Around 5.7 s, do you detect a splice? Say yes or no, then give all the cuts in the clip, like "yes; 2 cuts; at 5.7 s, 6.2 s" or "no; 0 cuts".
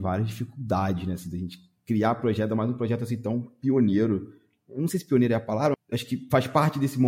yes; 1 cut; at 5.7 s